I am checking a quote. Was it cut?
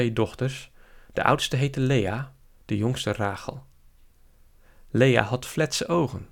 no; 0 cuts

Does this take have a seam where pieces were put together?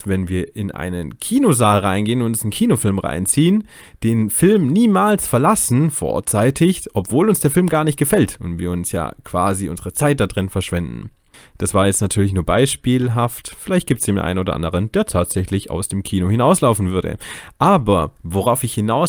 no; 0 cuts

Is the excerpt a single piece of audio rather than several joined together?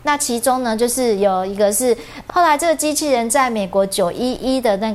no; 1 cut; at 2.3 s

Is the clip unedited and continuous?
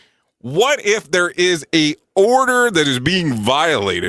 yes; 0 cuts

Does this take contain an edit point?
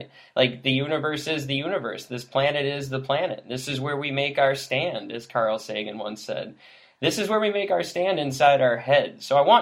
no; 0 cuts

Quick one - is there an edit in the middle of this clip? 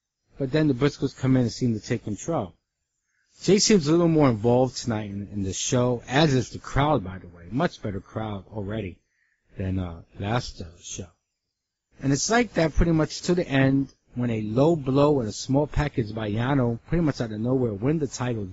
no; 0 cuts

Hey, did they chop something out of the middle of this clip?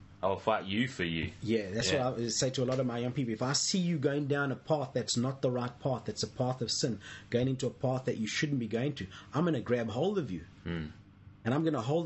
no; 0 cuts

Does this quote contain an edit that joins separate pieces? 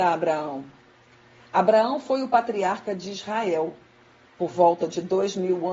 no; 0 cuts

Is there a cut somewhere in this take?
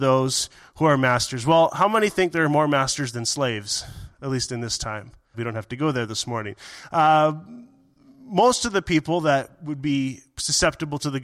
yes; 1 cut; at 5.3 s

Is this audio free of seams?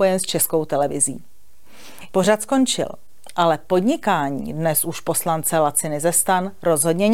no; 1 cut; at 2.1 s

